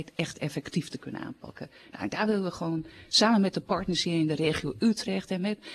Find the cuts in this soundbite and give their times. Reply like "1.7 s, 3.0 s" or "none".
none

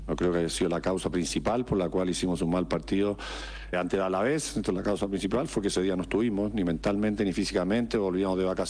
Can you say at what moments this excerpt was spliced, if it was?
3.7 s

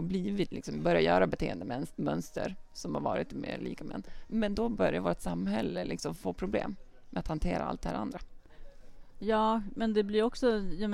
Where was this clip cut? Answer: none

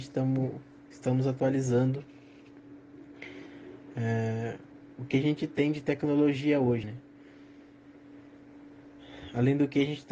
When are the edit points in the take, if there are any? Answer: 6.8 s

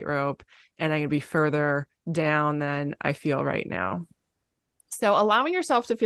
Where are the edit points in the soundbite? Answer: none

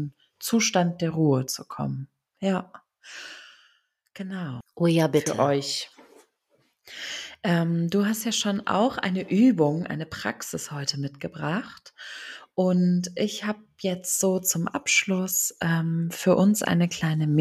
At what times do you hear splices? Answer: 4.6 s

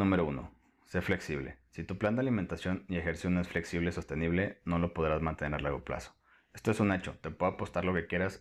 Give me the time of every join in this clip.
none

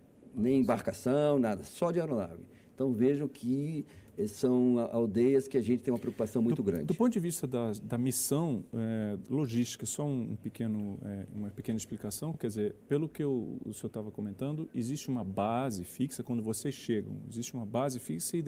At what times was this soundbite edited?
none

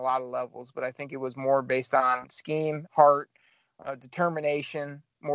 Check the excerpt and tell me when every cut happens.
2.9 s

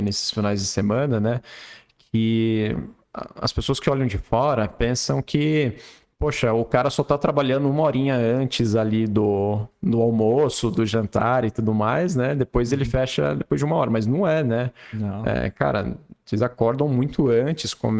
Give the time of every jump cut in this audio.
none

